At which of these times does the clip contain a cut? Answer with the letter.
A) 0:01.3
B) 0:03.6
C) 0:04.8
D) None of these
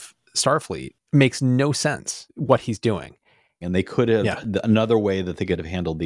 B